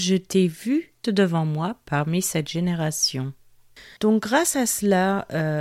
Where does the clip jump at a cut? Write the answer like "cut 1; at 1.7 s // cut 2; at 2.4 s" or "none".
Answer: cut 1; at 1.0 s // cut 2; at 4.0 s